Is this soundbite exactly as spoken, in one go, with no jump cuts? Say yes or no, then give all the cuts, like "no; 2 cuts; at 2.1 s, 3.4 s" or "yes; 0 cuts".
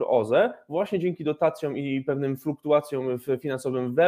yes; 0 cuts